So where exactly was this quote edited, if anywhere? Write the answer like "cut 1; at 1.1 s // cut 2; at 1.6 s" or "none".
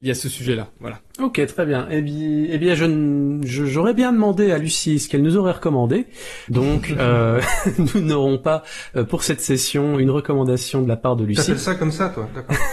cut 1; at 6.5 s